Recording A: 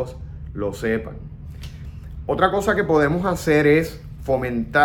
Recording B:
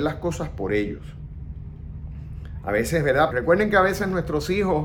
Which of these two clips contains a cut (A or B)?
B